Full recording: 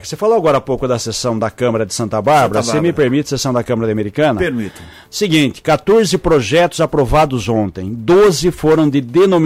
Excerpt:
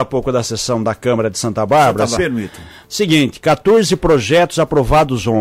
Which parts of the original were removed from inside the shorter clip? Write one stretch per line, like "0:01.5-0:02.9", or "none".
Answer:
0:02.7-0:04.4